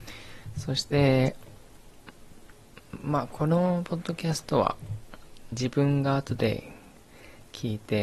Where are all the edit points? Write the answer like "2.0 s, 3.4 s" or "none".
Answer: 5.5 s